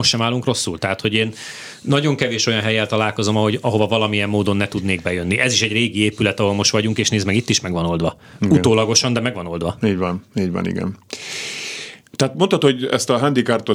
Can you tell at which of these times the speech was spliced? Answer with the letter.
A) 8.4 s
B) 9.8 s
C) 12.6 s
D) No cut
D